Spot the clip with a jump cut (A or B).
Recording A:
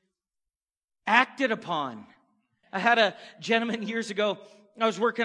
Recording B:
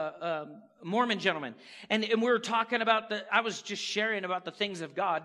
A